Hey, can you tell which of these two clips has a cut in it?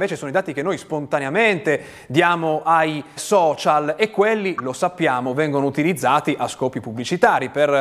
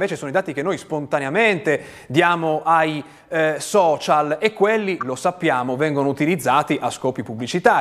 first; 1 cut; at 3.2 s

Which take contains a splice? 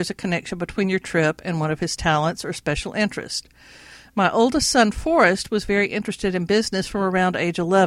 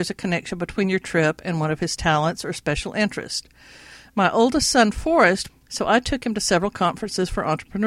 second; 1 cut; at 5.5 s

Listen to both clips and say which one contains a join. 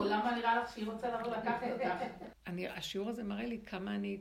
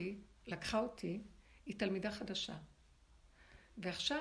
first; 1 cut; at 2.3 s

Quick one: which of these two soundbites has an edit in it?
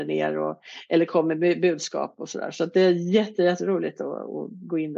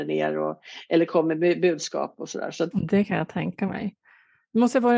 second; 1 cut; at 2.7 s

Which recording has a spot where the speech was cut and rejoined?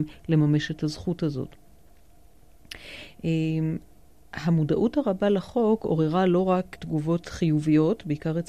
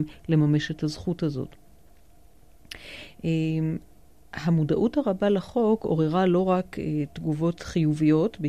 first; 1 cut; at 6.7 s

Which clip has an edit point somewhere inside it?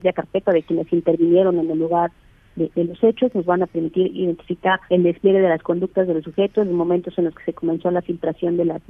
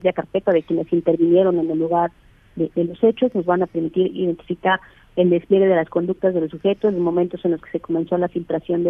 first; 1 cut; at 4.9 s

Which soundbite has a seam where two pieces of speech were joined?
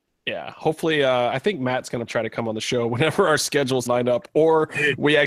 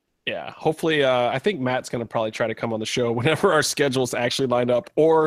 first; 2 cuts; at 2.1 s, 3.9 s

